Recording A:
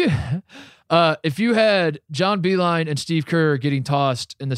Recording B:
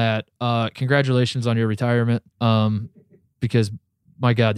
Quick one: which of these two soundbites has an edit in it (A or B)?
B